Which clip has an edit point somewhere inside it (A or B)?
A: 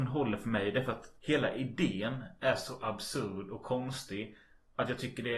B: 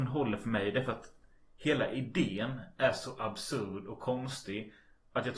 A